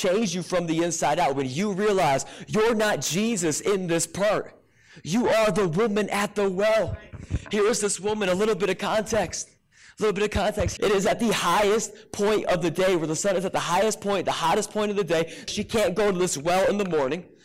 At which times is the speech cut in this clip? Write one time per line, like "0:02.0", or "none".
0:10.8
0:15.5